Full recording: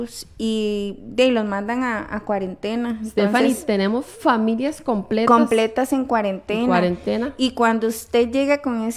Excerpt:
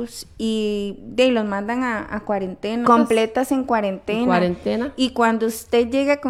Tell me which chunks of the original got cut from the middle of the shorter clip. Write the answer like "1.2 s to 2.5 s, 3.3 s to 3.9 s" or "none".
2.9 s to 5.3 s